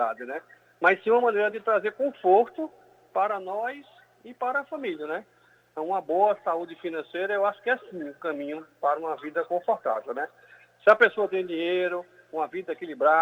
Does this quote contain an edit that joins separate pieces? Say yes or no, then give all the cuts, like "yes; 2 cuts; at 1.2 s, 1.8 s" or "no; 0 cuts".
no; 0 cuts